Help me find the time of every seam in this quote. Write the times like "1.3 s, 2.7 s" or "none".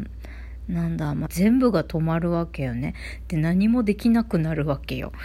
1.3 s

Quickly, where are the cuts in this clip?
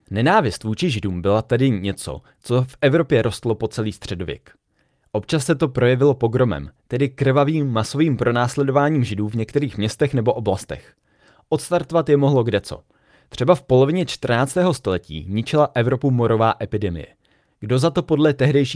none

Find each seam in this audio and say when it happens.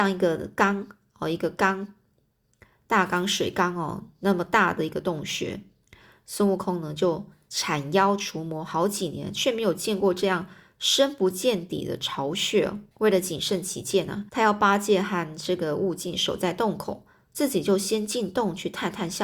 12.9 s, 14.3 s

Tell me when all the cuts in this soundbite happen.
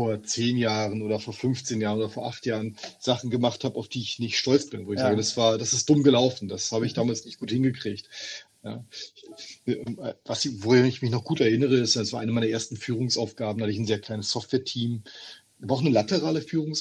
8.5 s, 14.0 s

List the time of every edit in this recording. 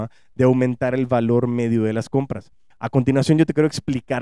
2.7 s

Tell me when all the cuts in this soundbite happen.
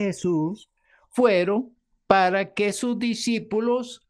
none

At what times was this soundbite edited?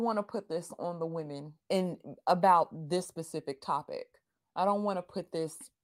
1.6 s

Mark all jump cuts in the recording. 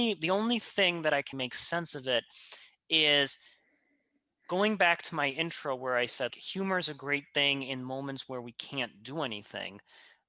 1.3 s, 6.3 s

